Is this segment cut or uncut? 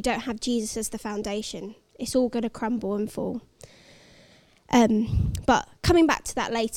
uncut